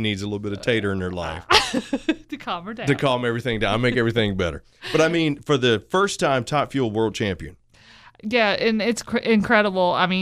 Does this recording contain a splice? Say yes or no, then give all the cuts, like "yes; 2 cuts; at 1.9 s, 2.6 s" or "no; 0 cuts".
no; 0 cuts